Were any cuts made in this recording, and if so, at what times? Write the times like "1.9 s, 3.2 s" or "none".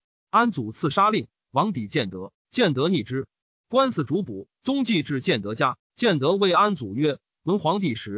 none